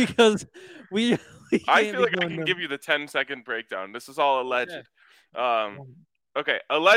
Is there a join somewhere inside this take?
no; 0 cuts

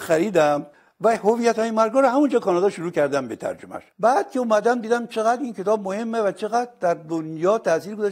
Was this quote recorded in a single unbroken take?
no; 1 cut; at 3.9 s

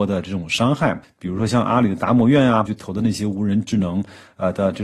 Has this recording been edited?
yes; 2 cuts; at 1.0 s, 2.7 s

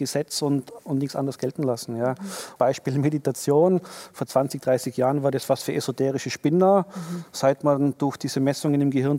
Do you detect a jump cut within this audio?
yes; 1 cut; at 2.6 s

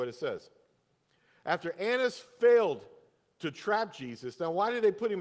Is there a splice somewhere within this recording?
no; 0 cuts

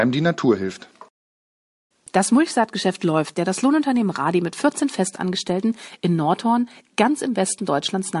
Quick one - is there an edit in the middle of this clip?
yes; 2 cuts; at 1.9 s, 3.3 s

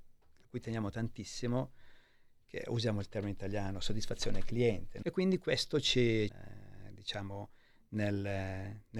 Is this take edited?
yes; 2 cuts; at 5.0 s, 6.3 s

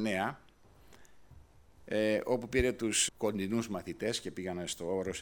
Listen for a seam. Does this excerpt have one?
yes; 1 cut; at 3.1 s

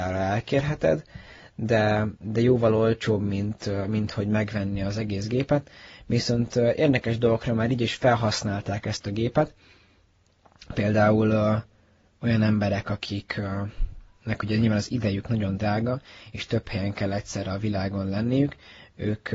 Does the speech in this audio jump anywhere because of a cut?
no; 0 cuts

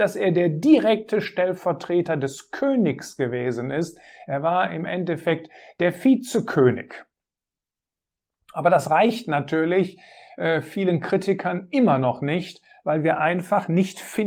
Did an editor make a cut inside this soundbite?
no; 0 cuts

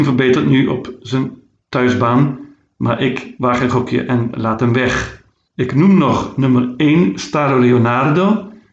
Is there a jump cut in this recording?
no; 0 cuts

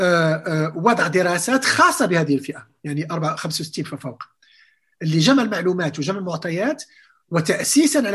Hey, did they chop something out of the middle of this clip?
no; 0 cuts

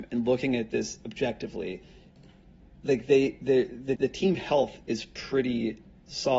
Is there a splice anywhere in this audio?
yes; 1 cut; at 4.0 s

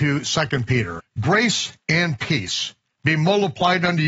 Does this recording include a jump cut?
yes; 1 cut; at 1.0 s

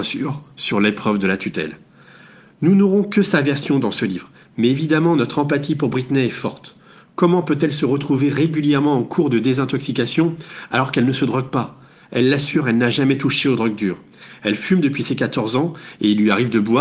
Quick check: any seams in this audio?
no; 0 cuts

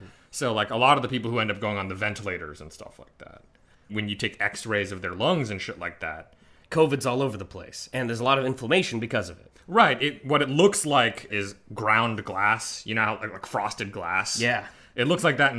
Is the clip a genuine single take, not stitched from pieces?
no; 1 cut; at 3.7 s

